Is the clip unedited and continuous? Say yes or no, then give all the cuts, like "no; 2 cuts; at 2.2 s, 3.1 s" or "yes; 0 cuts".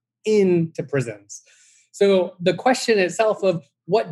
yes; 0 cuts